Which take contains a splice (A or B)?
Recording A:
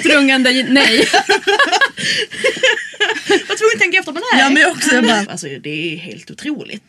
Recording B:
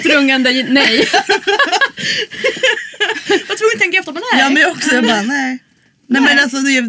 A